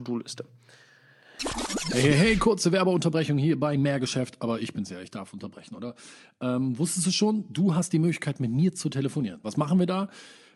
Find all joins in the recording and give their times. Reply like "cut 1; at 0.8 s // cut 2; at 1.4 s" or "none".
cut 1; at 9.4 s